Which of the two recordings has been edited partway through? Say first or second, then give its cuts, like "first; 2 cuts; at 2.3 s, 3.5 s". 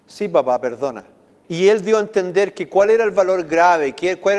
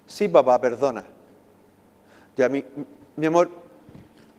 first; 1 cut; at 1.4 s